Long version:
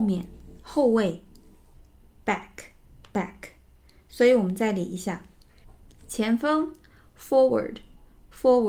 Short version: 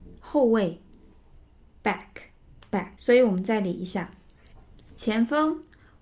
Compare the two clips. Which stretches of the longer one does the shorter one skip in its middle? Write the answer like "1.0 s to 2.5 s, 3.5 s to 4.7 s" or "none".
3.4 s to 4.1 s